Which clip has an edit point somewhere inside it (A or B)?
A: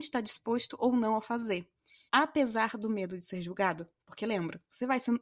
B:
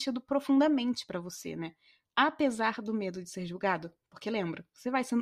A